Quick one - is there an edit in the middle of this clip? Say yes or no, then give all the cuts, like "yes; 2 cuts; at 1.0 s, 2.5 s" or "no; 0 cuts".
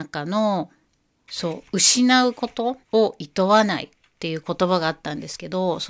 yes; 2 cuts; at 1.3 s, 2.8 s